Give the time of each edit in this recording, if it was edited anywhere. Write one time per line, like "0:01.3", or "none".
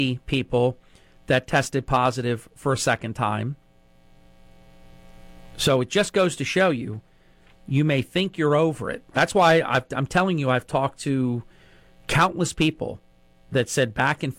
none

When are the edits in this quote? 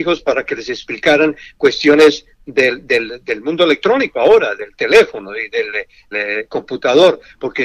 0:06.1

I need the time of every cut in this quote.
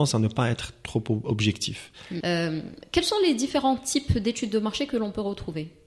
0:02.2

